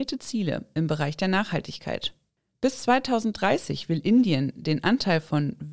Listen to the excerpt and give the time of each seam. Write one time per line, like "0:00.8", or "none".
none